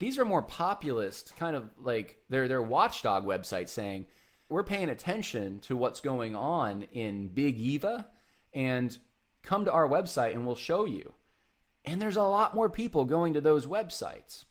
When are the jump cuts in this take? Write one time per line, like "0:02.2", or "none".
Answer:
0:04.5